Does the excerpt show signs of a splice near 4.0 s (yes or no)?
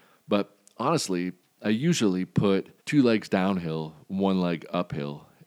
no